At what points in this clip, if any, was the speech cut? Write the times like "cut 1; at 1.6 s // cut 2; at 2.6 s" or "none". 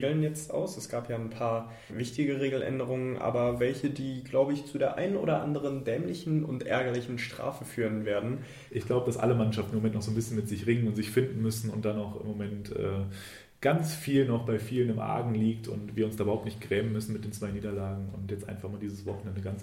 cut 1; at 1.9 s // cut 2; at 8.7 s